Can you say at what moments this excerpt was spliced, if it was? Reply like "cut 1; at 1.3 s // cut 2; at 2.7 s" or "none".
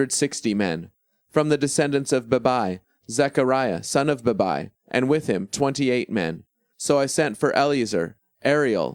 cut 1; at 6.7 s